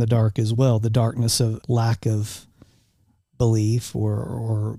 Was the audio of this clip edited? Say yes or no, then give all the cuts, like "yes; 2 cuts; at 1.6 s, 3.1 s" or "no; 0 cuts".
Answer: yes; 1 cut; at 1.6 s